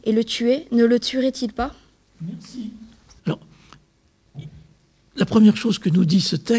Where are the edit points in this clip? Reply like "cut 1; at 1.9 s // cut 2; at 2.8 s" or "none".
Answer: cut 1; at 3.2 s